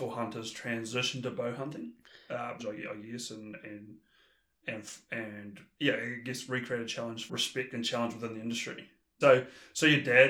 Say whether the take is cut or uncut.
cut